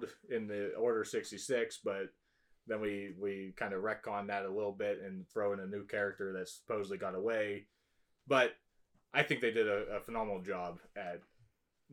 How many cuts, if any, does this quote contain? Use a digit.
0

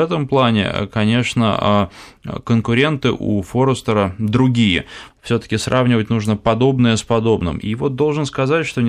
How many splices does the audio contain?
2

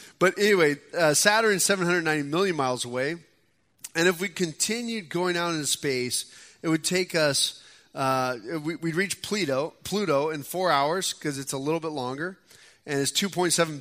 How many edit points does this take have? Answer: 0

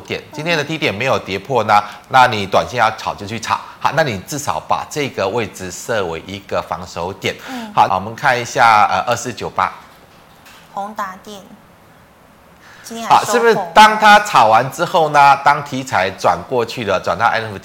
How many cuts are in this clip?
1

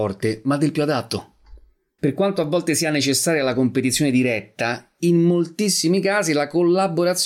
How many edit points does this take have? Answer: 1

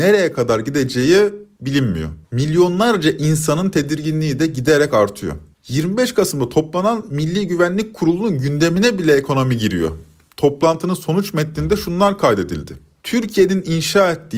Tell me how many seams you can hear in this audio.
1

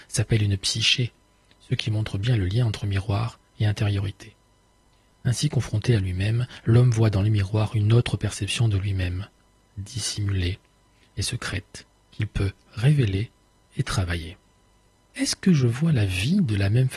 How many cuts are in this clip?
1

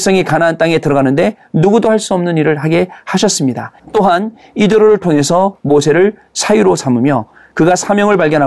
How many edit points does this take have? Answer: 1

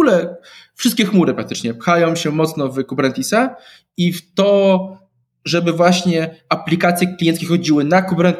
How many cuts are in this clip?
0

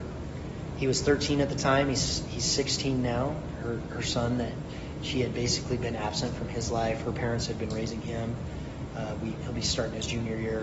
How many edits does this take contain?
1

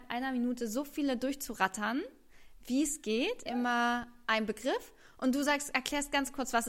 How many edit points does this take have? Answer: 1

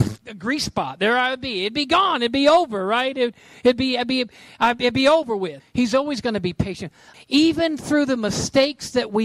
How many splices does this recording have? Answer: 2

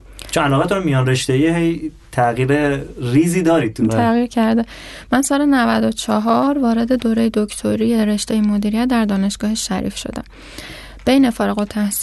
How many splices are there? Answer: 1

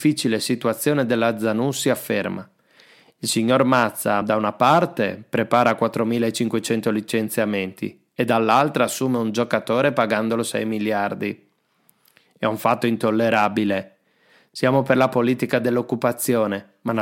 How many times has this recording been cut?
0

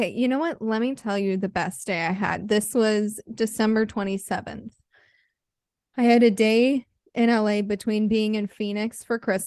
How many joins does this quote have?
0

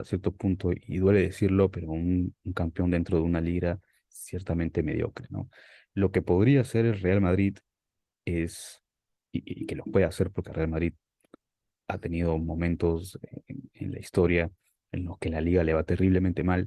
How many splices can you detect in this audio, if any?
0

